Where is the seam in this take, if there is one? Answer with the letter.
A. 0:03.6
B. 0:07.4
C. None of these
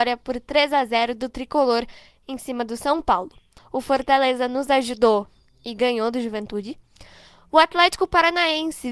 A